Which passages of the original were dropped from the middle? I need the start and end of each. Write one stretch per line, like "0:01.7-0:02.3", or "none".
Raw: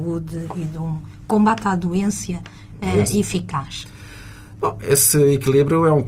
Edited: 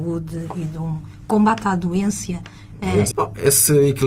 0:03.1-0:04.6